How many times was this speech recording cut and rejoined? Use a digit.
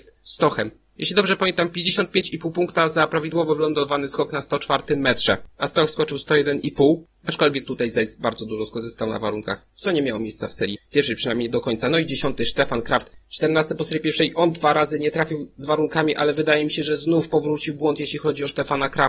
0